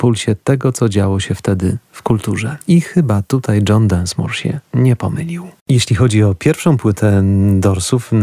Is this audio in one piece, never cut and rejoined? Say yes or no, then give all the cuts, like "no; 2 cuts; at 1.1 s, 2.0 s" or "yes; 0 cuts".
no; 1 cut; at 2.6 s